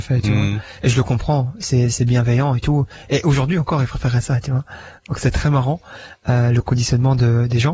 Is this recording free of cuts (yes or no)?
yes